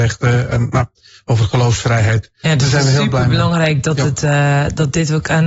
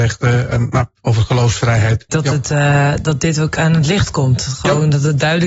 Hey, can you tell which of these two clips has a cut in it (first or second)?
second